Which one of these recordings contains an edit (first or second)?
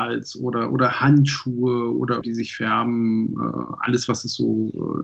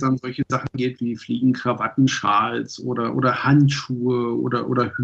first